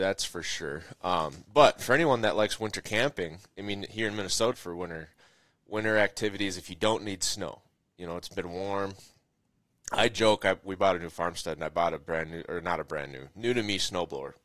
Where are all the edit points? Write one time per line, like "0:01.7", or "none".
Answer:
0:04.5